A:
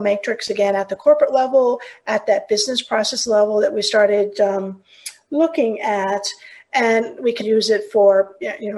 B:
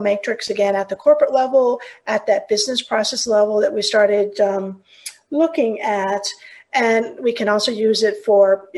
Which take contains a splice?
A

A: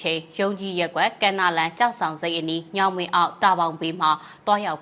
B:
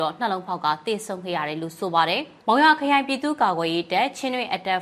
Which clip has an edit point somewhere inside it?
B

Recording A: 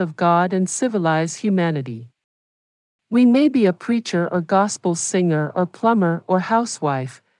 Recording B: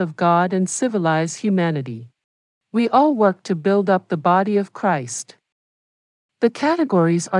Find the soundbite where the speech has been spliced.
B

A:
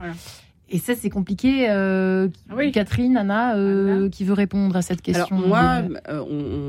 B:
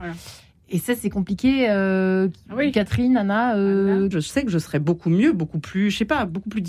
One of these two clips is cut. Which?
B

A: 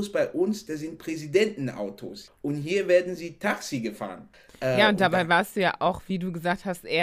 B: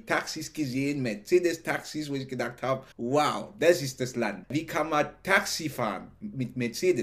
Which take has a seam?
B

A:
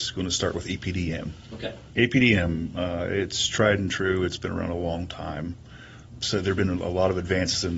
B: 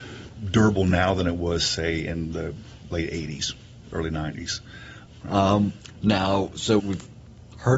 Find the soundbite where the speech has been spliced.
B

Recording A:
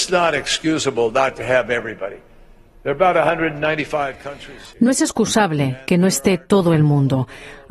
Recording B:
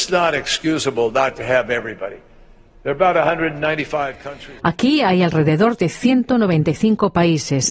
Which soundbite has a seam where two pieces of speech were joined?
B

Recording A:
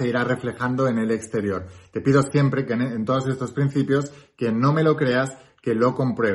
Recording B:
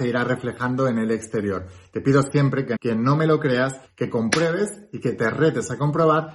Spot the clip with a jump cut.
B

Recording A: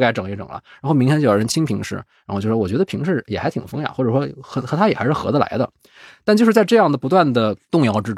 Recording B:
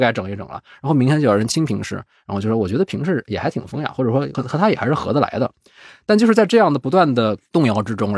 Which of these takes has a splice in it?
B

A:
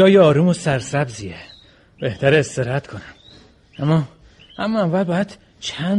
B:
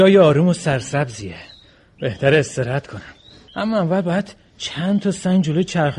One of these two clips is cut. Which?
B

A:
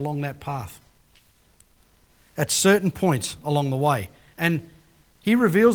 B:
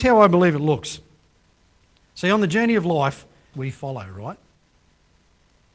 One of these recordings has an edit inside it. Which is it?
B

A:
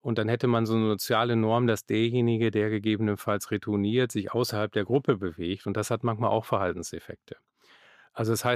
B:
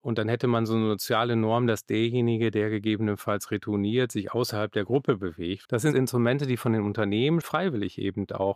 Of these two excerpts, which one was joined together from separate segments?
B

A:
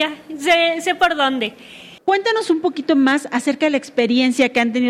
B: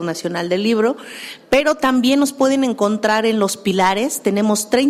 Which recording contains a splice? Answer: A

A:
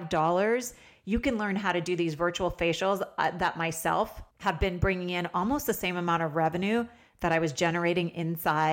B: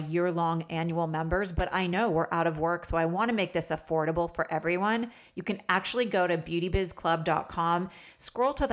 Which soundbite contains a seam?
A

